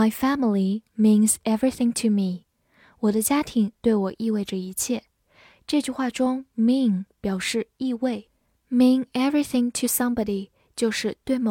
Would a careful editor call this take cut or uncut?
uncut